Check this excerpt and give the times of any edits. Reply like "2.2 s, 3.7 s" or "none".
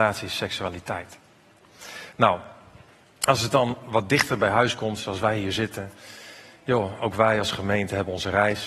none